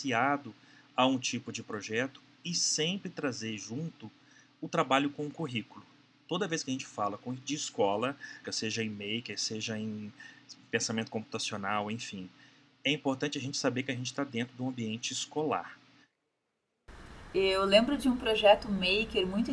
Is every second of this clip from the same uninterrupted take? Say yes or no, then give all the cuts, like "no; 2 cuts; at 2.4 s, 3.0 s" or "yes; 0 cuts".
no; 2 cuts; at 8.4 s, 17.3 s